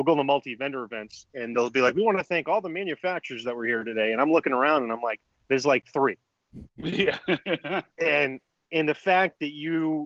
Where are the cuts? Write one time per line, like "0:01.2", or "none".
none